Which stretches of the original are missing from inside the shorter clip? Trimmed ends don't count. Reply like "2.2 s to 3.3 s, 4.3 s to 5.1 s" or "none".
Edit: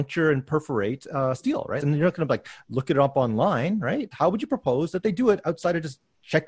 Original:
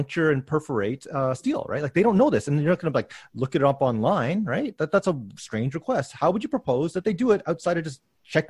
1.8 s to 2.4 s, 4.8 s to 6.1 s